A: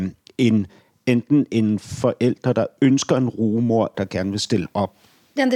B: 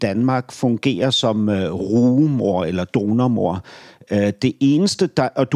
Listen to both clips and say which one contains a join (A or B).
A